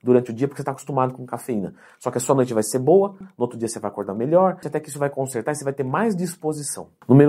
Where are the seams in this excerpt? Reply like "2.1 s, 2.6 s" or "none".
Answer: 3.2 s, 4.6 s